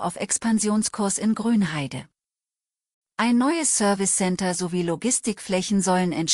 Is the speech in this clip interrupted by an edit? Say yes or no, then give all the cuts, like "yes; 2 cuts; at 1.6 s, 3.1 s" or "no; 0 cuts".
no; 0 cuts